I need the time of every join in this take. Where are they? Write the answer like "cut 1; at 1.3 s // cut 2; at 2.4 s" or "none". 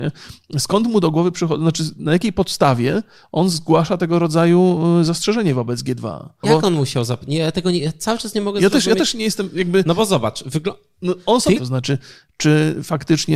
cut 1; at 6.4 s // cut 2; at 11.6 s